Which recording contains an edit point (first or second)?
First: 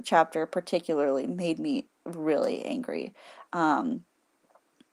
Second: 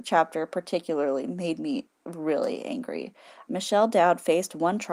second